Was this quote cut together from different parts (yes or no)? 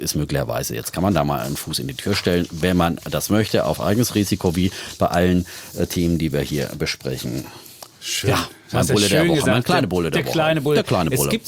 no